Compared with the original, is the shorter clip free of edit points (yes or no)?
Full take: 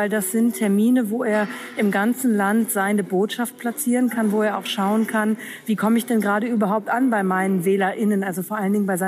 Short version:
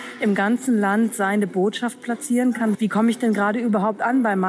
no